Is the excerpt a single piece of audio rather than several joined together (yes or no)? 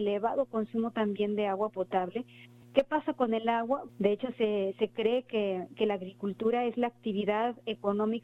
no